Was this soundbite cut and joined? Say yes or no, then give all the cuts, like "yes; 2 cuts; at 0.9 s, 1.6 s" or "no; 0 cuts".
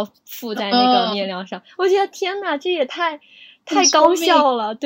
no; 0 cuts